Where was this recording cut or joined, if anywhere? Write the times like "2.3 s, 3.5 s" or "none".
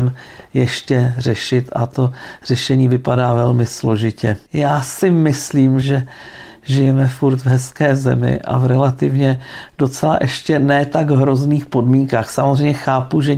4.5 s, 5.8 s